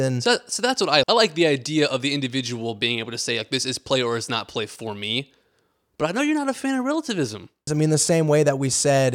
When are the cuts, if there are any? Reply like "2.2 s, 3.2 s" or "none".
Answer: 1.0 s, 7.7 s